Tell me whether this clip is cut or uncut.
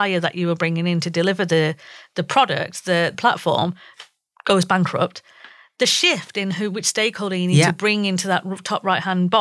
cut